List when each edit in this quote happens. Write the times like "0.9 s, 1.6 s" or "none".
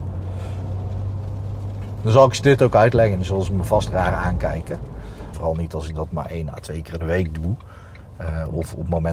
5.3 s